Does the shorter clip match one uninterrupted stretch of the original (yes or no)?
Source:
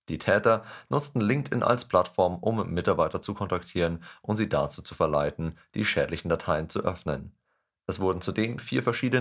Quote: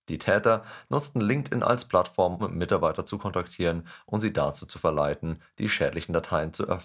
no